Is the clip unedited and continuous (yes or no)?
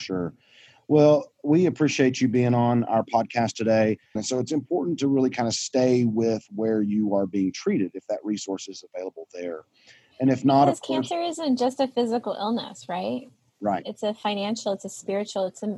no